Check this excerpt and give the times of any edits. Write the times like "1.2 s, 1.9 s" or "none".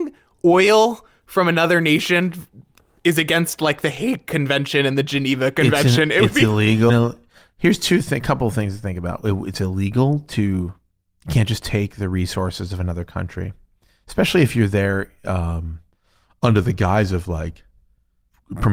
6.9 s